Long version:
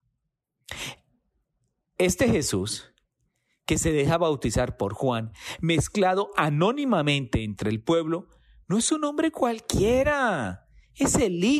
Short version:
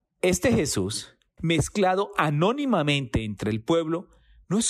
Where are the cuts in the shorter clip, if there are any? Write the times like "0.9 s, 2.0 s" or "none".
1.4 s